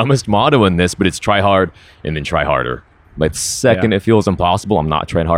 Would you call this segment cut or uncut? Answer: uncut